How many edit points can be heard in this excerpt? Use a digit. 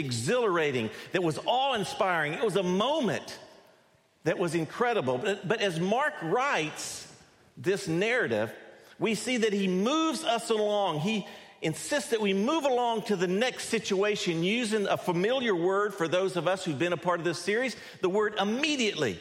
0